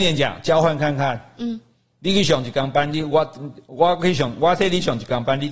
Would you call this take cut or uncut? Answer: uncut